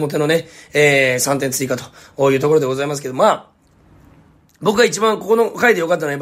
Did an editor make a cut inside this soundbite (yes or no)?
no